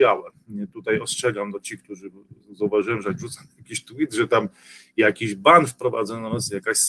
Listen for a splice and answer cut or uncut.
uncut